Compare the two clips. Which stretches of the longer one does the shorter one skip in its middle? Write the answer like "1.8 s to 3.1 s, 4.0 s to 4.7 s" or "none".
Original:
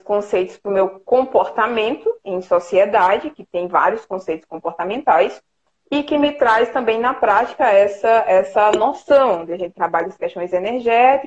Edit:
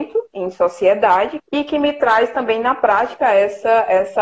3.3 s to 5.8 s